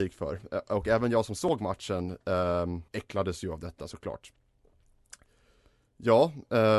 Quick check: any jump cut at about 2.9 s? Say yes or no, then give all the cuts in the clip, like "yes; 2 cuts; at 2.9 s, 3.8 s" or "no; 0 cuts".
yes; 1 cut; at 2.9 s